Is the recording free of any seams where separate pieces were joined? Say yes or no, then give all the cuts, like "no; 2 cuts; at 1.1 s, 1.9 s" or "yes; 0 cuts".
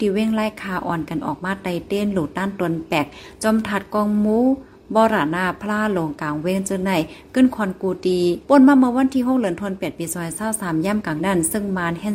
no; 1 cut; at 11.2 s